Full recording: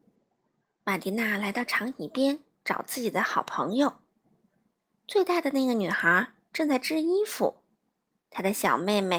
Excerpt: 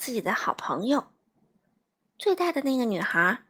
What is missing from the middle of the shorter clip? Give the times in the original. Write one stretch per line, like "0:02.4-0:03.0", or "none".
none